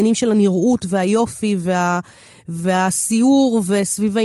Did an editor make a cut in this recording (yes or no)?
no